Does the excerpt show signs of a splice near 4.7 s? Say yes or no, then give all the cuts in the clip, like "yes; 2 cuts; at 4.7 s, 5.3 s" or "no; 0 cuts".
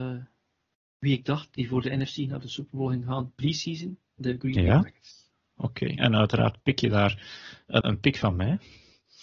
no; 2 cuts; at 6.0 s, 7.8 s